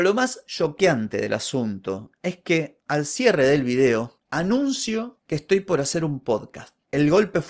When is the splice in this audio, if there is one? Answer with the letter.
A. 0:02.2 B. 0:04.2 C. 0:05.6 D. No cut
B